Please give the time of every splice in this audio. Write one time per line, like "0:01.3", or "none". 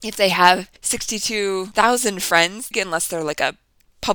0:02.7